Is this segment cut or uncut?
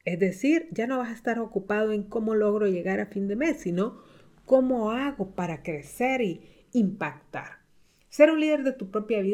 uncut